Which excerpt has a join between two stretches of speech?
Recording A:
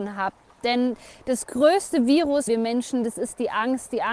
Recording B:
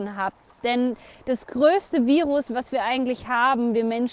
A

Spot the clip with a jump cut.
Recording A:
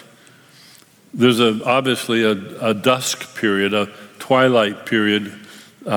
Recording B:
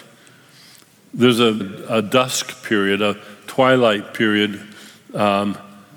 B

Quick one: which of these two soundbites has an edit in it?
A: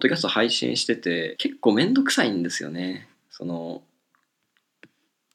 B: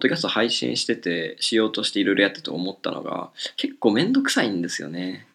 A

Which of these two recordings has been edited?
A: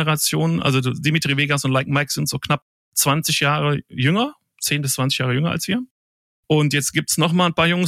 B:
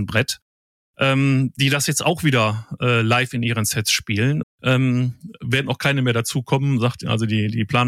B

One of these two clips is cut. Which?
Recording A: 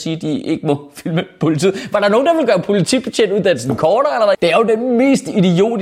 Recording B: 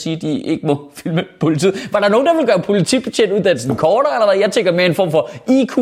A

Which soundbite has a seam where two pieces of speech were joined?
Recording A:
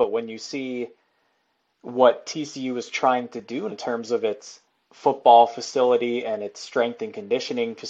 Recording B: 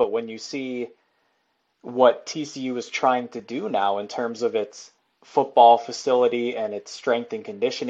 A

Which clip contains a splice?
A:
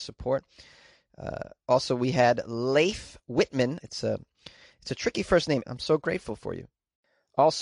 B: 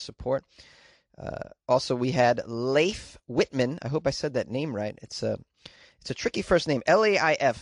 A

